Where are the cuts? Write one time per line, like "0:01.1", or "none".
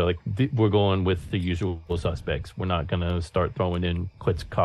0:01.3